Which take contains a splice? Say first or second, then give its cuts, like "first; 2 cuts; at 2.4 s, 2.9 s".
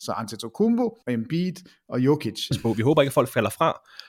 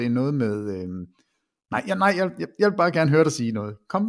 first; 2 cuts; at 1.0 s, 2.5 s